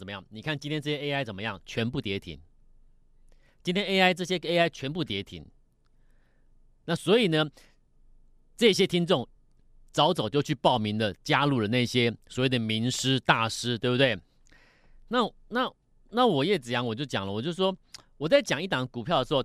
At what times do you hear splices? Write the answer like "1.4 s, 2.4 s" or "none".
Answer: none